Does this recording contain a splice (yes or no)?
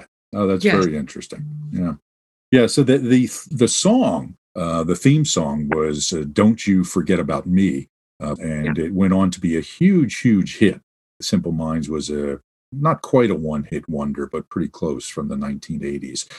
yes